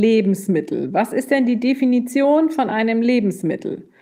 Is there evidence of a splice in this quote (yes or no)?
no